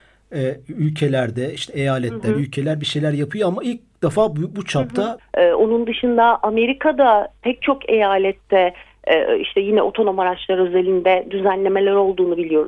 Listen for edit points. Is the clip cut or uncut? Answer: cut